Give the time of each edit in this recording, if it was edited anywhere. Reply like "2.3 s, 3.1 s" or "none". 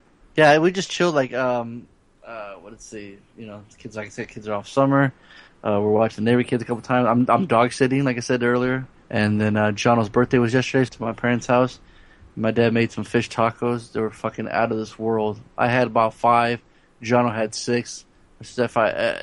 9.0 s, 10.9 s

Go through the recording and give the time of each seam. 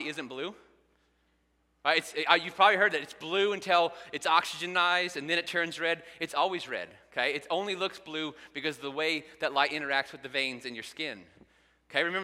none

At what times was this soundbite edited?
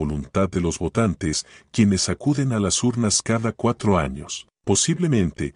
4.6 s

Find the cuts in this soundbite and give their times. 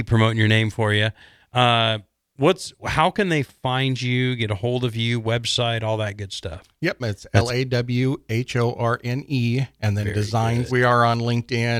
7.0 s, 10.7 s

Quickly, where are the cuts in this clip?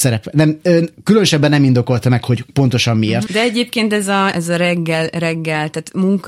3.3 s, 4.3 s

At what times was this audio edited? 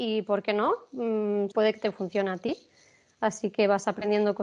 1.5 s

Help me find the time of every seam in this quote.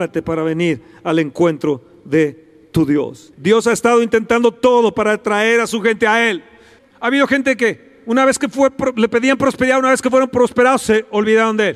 3.3 s, 6.8 s

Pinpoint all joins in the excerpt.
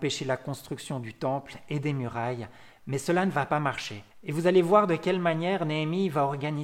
4.1 s

